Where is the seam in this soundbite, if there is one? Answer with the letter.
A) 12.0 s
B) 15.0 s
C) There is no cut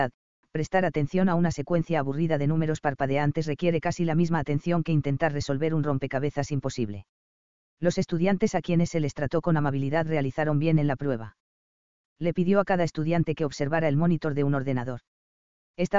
A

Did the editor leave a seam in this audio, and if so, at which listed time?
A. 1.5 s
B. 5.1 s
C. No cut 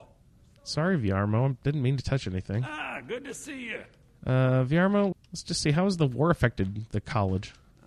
B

